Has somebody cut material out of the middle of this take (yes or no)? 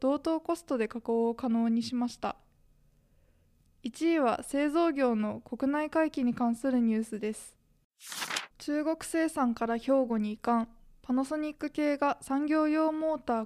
yes